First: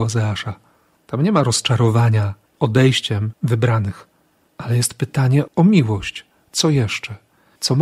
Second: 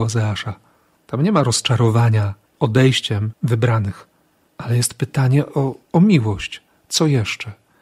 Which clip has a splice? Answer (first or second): first